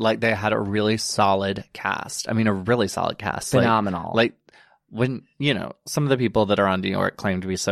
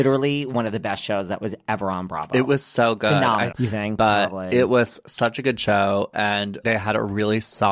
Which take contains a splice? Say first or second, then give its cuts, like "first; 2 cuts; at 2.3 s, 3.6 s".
second; 2 cuts; at 3.5 s, 6.6 s